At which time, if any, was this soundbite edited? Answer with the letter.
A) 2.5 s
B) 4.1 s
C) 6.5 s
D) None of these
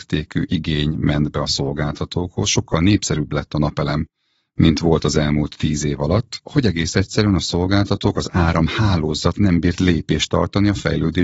D